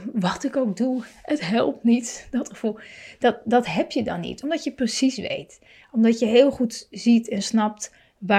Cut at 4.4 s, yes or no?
no